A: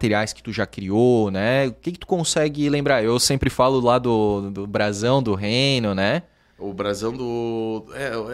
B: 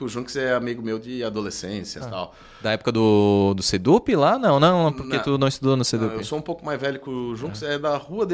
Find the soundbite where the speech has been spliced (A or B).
B